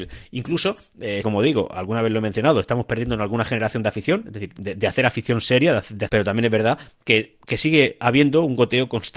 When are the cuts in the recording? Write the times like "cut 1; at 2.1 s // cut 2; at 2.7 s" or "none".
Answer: cut 1; at 1.2 s // cut 2; at 6.1 s